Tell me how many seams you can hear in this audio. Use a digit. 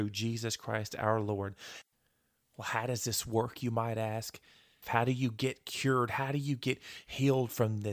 1